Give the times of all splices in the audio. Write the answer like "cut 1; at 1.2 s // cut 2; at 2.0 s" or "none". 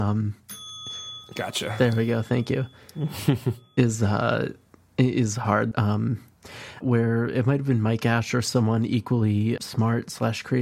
cut 1; at 5.7 s // cut 2; at 6.8 s // cut 3; at 9.6 s